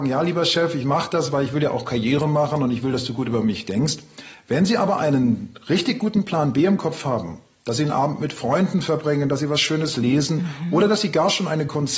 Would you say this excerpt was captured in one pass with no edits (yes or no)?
yes